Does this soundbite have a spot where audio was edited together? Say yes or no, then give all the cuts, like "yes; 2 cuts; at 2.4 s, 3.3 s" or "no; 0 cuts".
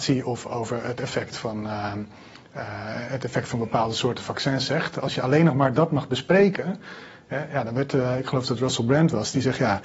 no; 0 cuts